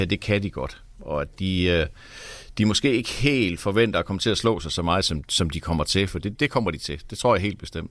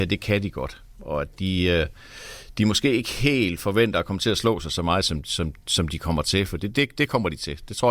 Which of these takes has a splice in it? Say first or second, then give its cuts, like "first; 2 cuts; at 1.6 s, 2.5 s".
first; 2 cuts; at 5.2 s, 6.4 s